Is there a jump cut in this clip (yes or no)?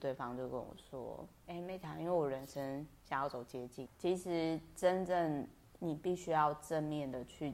yes